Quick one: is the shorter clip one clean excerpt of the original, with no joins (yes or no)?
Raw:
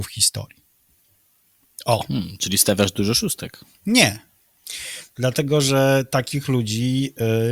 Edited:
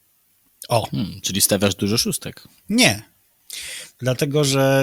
yes